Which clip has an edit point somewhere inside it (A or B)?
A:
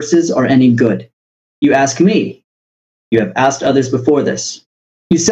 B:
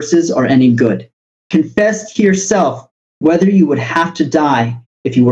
B